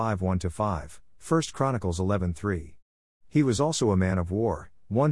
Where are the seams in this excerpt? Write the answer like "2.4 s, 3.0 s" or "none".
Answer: none